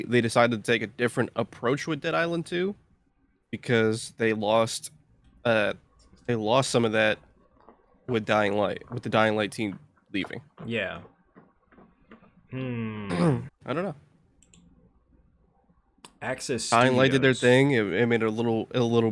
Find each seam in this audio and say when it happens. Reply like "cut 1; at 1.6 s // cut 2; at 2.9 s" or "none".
cut 1; at 13.5 s